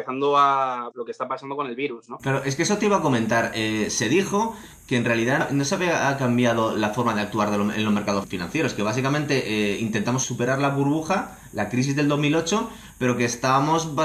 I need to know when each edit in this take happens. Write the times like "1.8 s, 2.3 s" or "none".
0.9 s

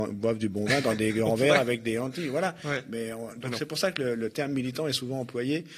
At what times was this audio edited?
none

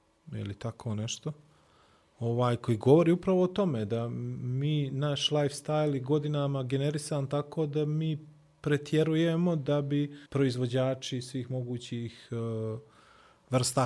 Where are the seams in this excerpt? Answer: 10.3 s

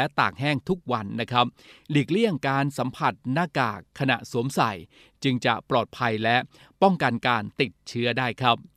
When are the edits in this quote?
none

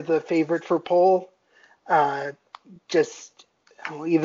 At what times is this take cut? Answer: none

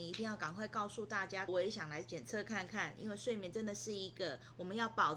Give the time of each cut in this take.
1.5 s

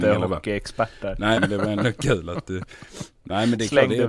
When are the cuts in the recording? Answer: 1.3 s

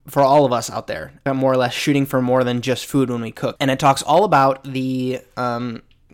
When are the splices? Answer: 1.3 s, 3.6 s

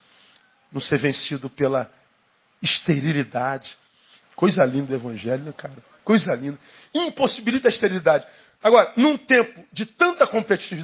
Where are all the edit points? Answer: 4.2 s, 6.0 s

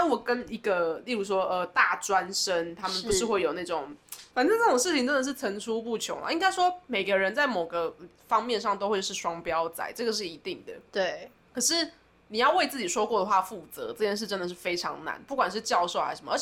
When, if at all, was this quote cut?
4.3 s

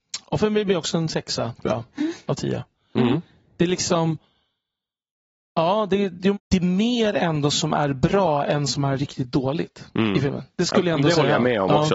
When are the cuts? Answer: 6.3 s

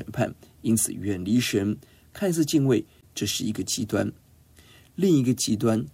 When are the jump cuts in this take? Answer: 3.0 s

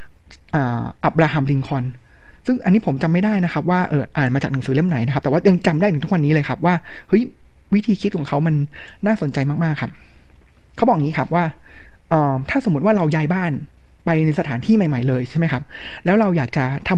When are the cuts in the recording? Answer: none

